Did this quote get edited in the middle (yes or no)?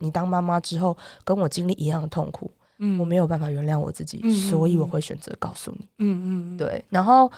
no